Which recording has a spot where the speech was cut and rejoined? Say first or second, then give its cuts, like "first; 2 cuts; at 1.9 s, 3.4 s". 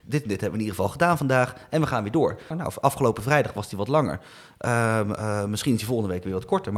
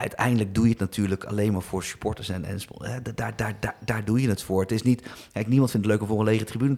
first; 1 cut; at 2.5 s